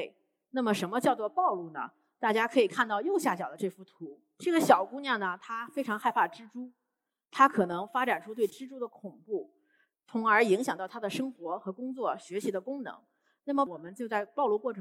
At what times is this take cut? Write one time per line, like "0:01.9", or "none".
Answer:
none